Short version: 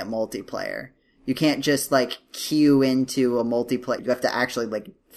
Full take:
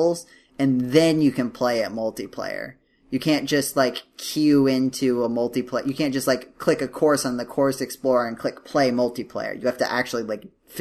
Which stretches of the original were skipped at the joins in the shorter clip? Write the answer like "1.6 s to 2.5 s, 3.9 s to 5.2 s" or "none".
5.8 s to 9.6 s